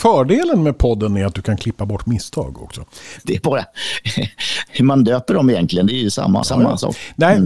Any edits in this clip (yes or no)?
yes